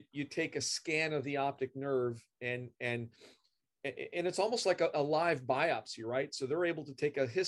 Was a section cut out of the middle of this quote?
no; 0 cuts

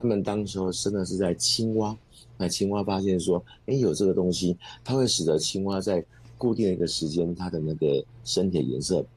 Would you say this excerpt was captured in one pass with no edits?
yes; 0 cuts

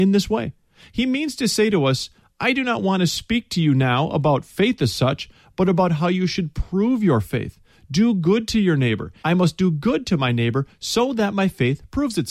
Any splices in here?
yes; 1 cut; at 9.2 s

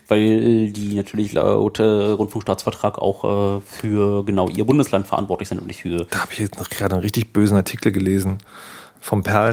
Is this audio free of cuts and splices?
yes; 0 cuts

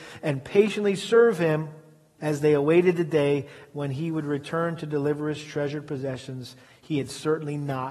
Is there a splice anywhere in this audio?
yes; 1 cut; at 2.2 s

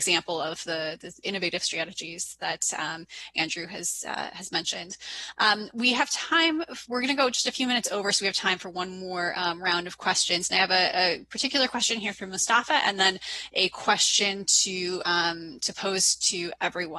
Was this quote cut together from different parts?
no; 0 cuts

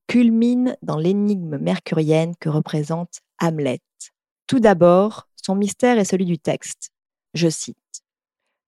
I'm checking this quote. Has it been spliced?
yes; 2 cuts; at 4.3 s, 7.3 s

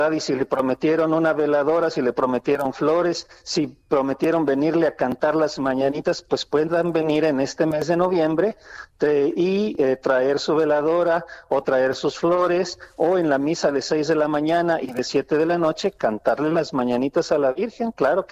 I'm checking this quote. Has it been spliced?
no; 0 cuts

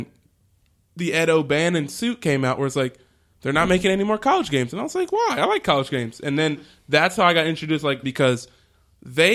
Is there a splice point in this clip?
yes; 1 cut; at 8.0 s

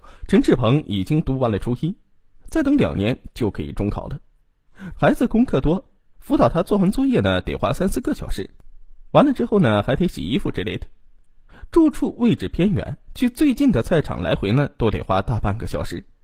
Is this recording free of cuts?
no; 1 cut; at 5.0 s

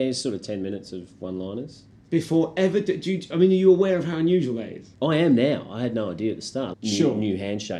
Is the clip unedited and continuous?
no; 2 cuts; at 4.9 s, 6.7 s

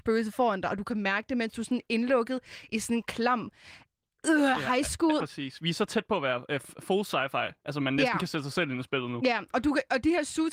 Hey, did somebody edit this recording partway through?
yes; 1 cut; at 5.2 s

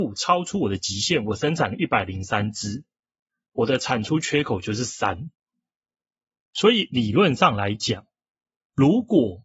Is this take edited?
no; 0 cuts

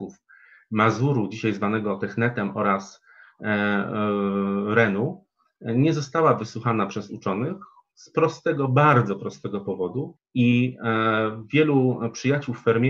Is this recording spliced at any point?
yes; 1 cut; at 10.2 s

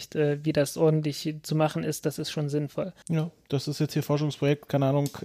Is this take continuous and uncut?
no; 1 cut; at 3.0 s

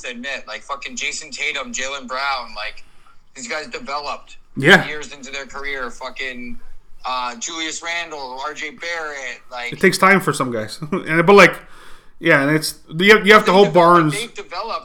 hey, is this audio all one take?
yes; 0 cuts

